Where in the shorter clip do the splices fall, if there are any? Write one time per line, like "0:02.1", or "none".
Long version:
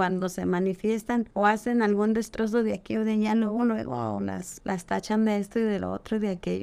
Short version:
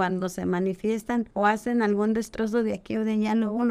none